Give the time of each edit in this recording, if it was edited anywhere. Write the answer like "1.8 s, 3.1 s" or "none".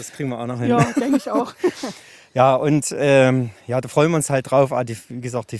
none